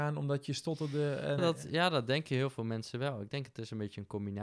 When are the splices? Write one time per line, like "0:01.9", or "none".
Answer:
0:01.4